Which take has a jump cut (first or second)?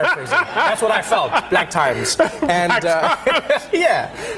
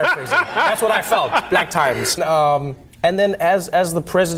second